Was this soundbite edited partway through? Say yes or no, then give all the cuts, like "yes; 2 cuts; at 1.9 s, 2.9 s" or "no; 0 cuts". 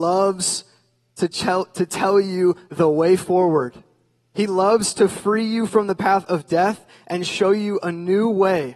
no; 0 cuts